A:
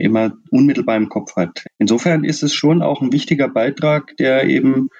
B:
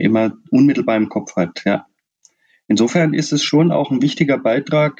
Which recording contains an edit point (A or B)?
A